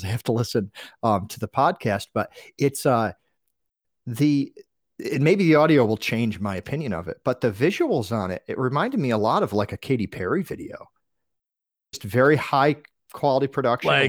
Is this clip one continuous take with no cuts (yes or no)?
yes